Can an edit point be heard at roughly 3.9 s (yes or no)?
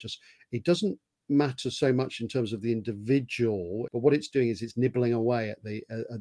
yes